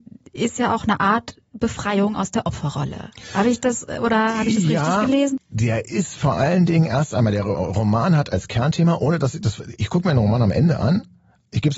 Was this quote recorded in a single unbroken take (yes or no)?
yes